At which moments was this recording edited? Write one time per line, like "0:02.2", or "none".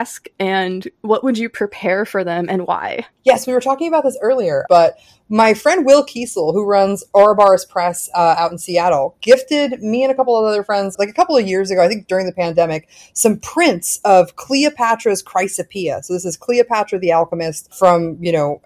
0:04.7
0:10.9